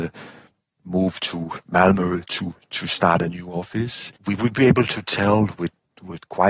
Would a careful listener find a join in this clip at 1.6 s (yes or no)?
yes